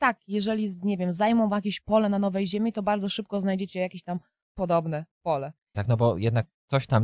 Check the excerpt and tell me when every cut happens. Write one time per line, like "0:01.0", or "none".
0:05.7